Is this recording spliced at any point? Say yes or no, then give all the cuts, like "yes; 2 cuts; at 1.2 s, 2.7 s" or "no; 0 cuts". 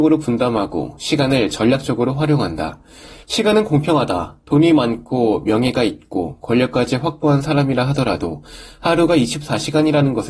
yes; 1 cut; at 3.2 s